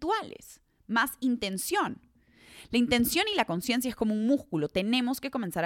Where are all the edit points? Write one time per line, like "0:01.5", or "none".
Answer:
none

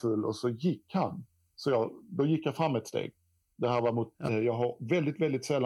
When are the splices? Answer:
0:04.3

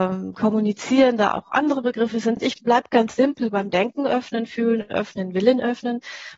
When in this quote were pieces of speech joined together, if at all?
none

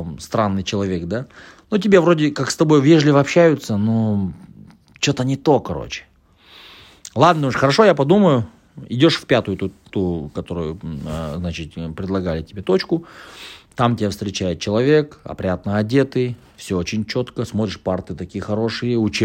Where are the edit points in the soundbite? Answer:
none

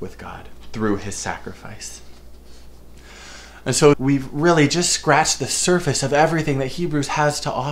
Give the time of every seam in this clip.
0:03.9

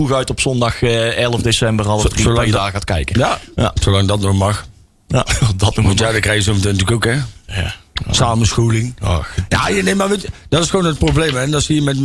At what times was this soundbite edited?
none

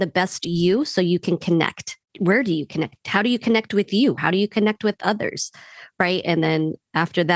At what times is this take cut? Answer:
0:04.2
0:06.2

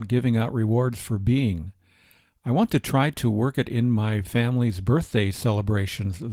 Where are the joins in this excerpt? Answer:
none

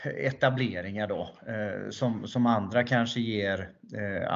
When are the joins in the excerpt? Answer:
none

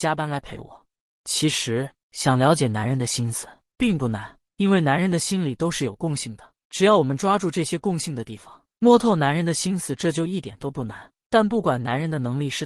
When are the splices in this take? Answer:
0:11.2

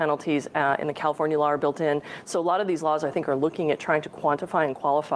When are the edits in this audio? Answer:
0:02.2

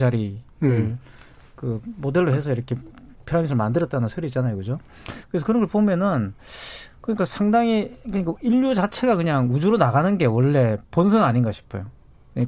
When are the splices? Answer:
none

